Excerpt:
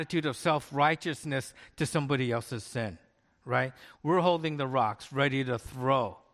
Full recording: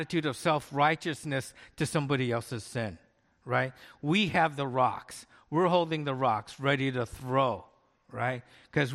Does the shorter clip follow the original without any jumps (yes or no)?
no